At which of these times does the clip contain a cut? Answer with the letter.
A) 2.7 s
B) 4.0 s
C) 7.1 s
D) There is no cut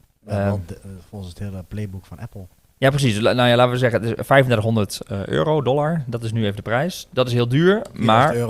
D